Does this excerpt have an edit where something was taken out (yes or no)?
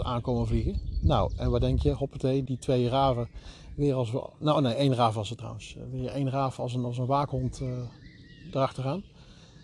yes